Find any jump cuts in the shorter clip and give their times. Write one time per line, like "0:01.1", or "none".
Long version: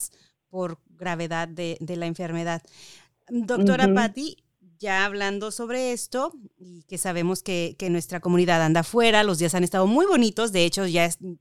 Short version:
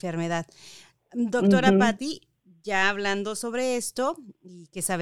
none